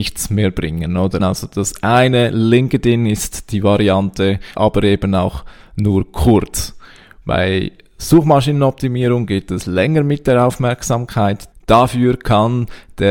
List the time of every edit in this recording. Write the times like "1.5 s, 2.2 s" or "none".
1.2 s, 4.5 s